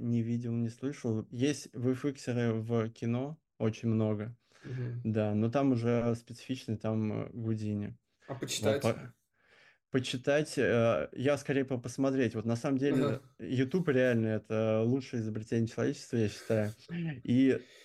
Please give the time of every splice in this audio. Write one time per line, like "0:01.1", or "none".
none